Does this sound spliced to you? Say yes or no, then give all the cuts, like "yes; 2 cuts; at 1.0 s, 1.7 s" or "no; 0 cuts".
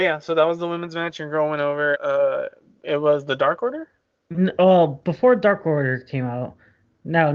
yes; 1 cut; at 1.9 s